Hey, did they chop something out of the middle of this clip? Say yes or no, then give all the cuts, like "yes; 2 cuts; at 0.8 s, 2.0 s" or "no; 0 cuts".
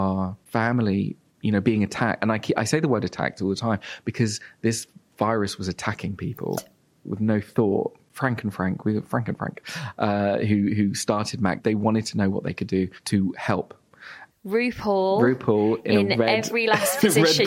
yes; 2 cuts; at 6.6 s, 14.3 s